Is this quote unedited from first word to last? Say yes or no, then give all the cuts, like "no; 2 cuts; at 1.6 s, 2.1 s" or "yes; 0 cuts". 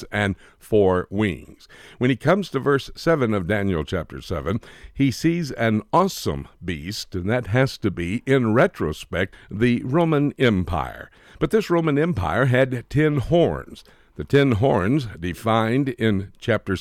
no; 1 cut; at 9.3 s